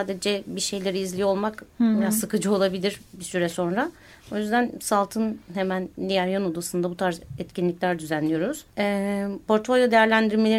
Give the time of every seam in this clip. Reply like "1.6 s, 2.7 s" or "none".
8.7 s